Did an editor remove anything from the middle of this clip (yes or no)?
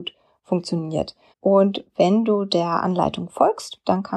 yes